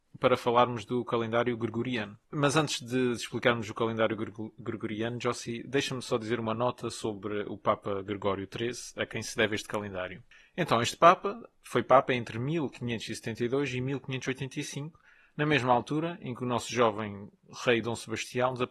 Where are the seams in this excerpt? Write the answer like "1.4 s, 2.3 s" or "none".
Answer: 2.2 s